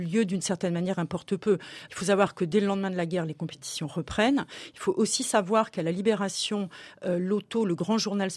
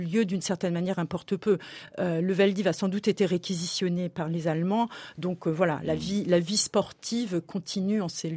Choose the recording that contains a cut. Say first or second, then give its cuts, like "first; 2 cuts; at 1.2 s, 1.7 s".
first; 1 cut; at 1.9 s